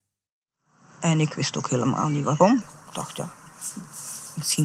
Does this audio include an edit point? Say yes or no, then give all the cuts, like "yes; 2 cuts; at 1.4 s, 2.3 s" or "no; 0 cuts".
no; 0 cuts